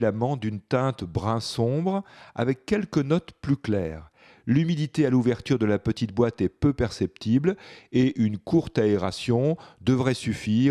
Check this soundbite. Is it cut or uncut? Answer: uncut